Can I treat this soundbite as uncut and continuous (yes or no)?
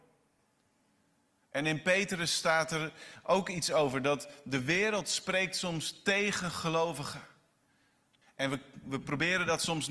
no